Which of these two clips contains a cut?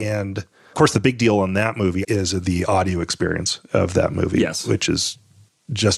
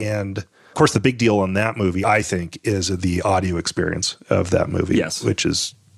first; 1 cut; at 2.0 s

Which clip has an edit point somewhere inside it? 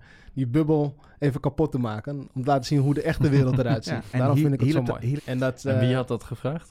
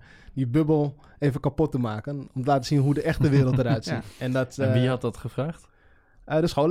first; 2 cuts; at 4.1 s, 5.2 s

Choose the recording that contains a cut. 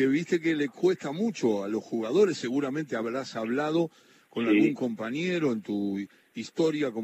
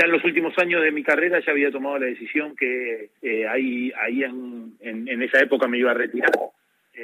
second; 1 cut; at 3.2 s

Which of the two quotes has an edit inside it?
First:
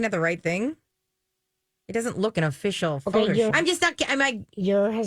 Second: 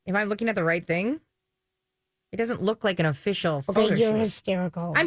first; 2 cuts; at 2.3 s, 3.5 s

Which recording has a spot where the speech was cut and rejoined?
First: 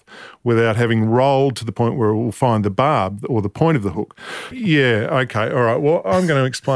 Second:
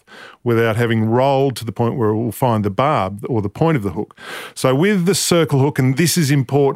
first; 1 cut; at 4.5 s

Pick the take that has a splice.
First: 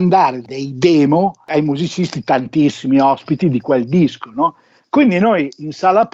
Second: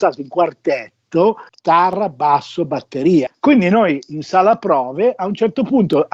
second; 2 cuts; at 1.5 s, 3.3 s

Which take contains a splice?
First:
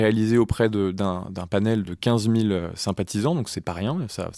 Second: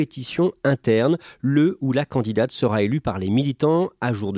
first; 1 cut; at 1.8 s

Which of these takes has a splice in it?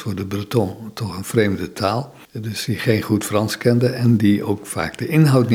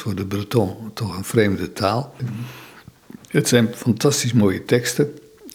second; 1 cut; at 2.2 s

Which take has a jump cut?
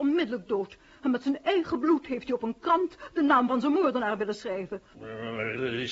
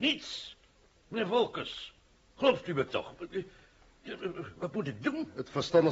first; 1 cut; at 4.9 s

